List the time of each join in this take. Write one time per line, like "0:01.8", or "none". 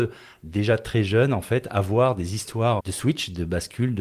0:02.8